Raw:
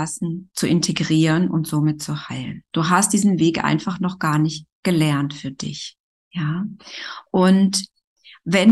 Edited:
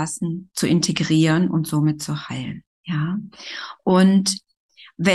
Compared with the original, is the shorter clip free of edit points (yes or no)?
no